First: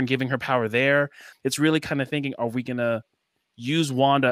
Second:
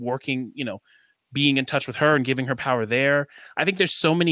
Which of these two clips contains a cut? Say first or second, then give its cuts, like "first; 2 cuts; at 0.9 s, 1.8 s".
first; 1 cut; at 1.3 s